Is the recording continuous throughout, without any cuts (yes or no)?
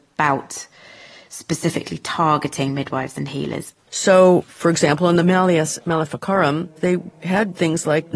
no